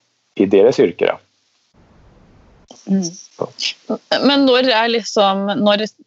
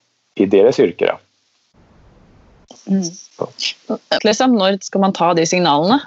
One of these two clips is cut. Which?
second; 1 cut; at 4.2 s

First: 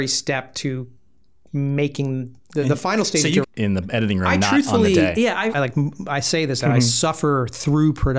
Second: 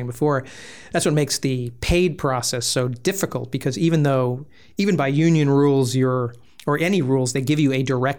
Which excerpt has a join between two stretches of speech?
first; 3 cuts; at 3.4 s, 5.5 s, 6.6 s

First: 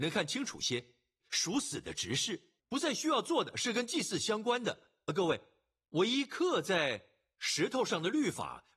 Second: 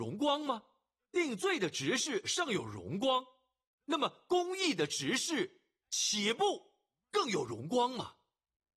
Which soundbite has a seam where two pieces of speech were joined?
first; 2 cuts; at 1.2 s, 2.6 s

